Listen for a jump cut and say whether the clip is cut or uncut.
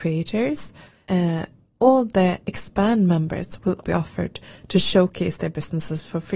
cut